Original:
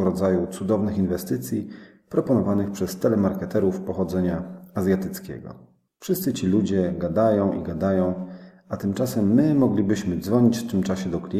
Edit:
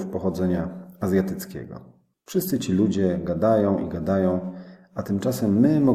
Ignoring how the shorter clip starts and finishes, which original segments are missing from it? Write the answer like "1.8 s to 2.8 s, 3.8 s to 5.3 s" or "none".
none